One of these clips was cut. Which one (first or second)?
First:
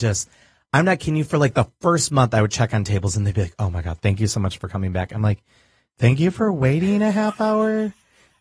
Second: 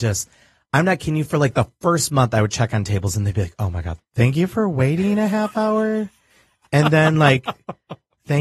second